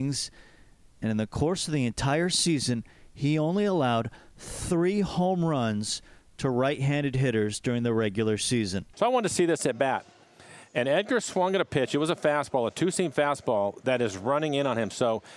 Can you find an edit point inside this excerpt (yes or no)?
yes